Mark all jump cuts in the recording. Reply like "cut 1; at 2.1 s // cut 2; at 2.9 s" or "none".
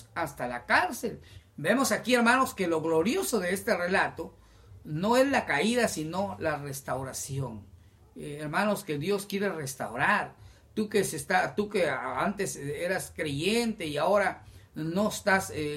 cut 1; at 1.4 s